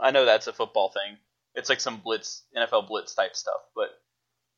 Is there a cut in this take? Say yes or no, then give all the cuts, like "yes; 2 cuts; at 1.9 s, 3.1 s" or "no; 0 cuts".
no; 0 cuts